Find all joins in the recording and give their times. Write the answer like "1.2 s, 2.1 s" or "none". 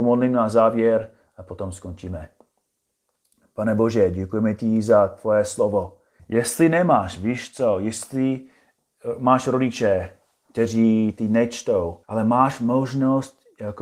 6.2 s, 12.0 s